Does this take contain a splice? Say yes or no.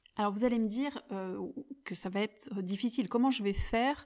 no